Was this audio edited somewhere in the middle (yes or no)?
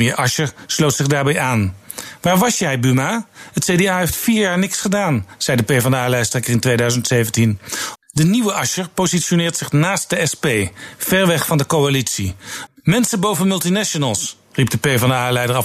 yes